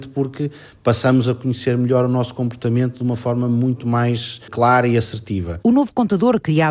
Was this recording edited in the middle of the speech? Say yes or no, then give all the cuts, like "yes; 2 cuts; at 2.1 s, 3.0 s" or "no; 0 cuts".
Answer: no; 0 cuts